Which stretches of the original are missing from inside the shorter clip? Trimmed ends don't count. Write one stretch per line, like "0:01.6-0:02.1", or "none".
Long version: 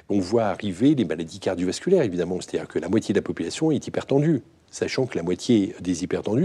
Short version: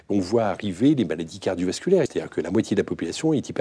0:02.1-0:02.4